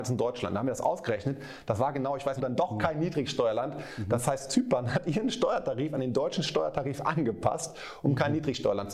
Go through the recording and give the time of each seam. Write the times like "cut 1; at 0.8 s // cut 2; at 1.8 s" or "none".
cut 1; at 2.4 s